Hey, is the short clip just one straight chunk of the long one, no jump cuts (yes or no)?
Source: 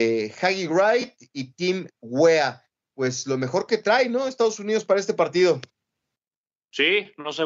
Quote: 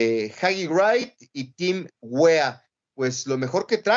yes